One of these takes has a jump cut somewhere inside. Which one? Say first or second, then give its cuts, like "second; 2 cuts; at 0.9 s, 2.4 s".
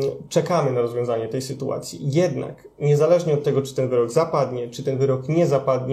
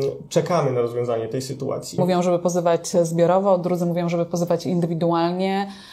second; 1 cut; at 2.0 s